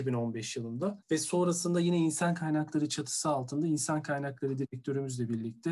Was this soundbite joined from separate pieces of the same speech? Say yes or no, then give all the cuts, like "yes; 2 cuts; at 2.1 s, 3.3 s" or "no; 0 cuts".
yes; 1 cut; at 1.0 s